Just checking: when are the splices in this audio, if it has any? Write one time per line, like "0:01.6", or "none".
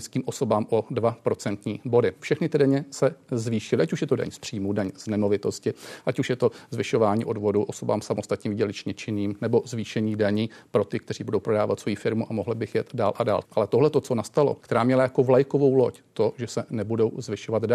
0:02.2
0:13.4
0:14.6